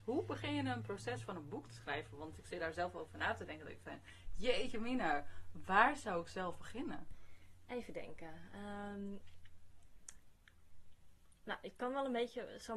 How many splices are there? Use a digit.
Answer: 0